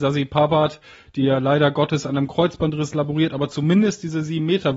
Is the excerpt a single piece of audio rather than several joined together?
yes; 0 cuts

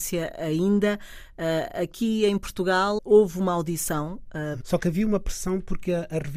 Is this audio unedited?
no; 2 cuts; at 3.0 s, 4.6 s

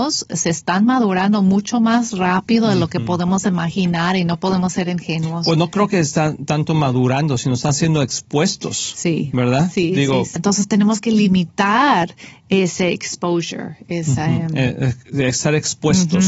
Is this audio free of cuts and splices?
no; 1 cut; at 10.4 s

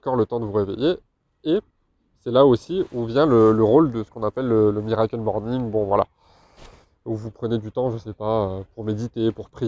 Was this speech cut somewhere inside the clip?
no; 0 cuts

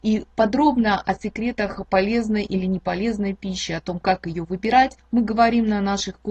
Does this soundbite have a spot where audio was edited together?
no; 0 cuts

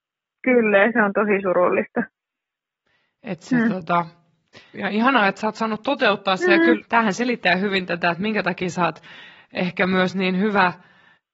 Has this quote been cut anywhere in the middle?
yes; 2 cuts; at 4.7 s, 6.8 s

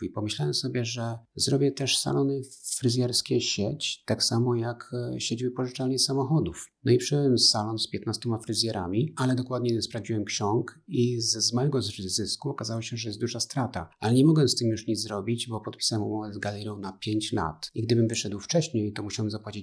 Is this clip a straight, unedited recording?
yes; 0 cuts

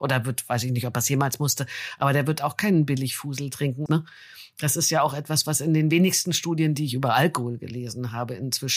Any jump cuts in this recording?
yes; 1 cut; at 3.9 s

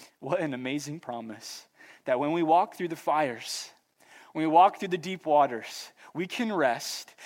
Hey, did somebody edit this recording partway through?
no; 0 cuts

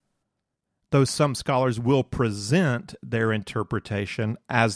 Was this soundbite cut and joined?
no; 0 cuts

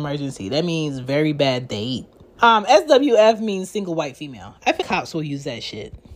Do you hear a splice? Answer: yes; 2 cuts; at 2.4 s, 4.8 s

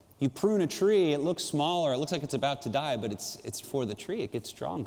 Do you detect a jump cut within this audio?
yes; 1 cut; at 3.6 s

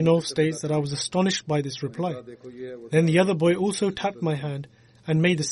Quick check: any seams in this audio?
no; 0 cuts

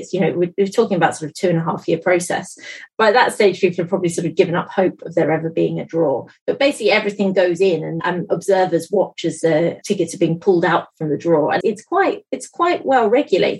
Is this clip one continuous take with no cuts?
no; 3 cuts; at 8.0 s, 9.8 s, 11.6 s

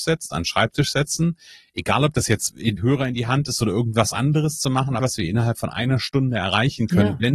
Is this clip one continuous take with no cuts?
no; 2 cuts; at 2.8 s, 5.0 s

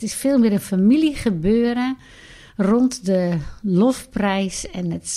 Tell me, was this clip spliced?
no; 0 cuts

